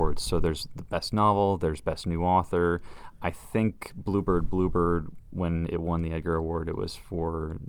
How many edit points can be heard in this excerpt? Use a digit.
0